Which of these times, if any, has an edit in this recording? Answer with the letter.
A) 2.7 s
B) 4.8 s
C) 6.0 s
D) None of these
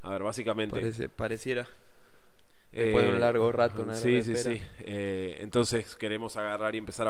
D